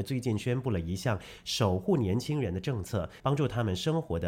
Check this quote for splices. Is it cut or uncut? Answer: cut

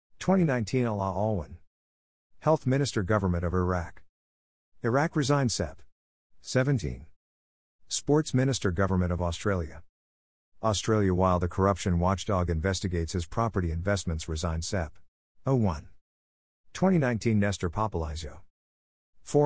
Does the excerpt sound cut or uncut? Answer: cut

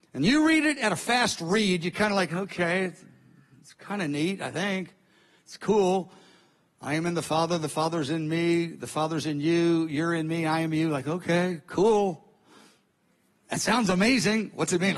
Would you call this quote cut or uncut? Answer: uncut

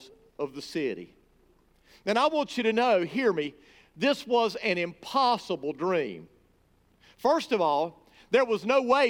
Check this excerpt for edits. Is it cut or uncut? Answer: uncut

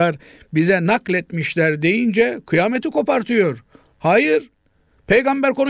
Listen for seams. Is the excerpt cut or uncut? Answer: uncut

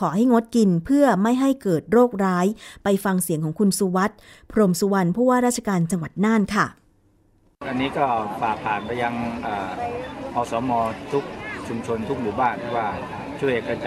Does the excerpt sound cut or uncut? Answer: uncut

